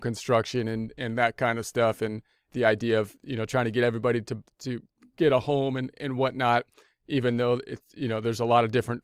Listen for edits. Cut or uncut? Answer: uncut